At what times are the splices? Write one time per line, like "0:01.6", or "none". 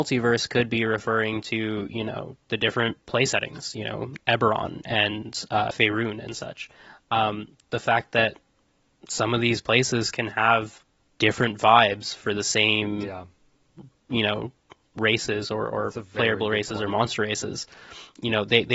none